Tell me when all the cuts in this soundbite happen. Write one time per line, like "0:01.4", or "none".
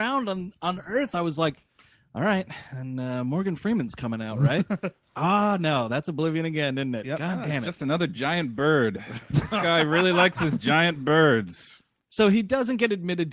none